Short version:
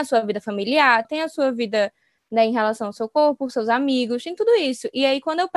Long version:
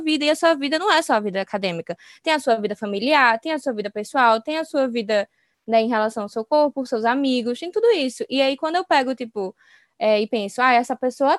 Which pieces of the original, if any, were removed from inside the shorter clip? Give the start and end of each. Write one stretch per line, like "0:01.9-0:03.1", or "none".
0:03.4-0:04.4